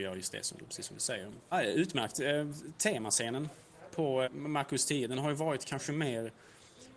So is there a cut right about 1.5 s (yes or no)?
yes